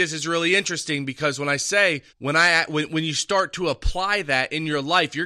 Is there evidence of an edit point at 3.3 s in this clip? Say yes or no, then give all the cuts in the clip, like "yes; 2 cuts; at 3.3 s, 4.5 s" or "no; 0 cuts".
no; 1 cut; at 2.1 s